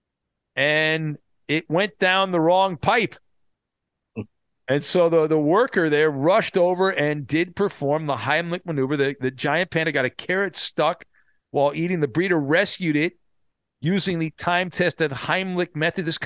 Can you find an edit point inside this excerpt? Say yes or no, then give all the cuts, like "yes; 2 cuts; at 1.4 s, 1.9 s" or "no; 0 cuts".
no; 0 cuts